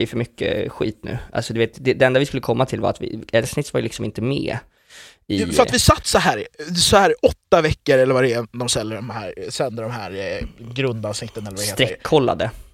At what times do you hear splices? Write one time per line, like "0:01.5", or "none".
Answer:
none